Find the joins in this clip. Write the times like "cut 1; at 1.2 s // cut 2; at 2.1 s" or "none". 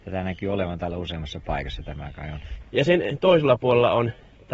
cut 1; at 2.6 s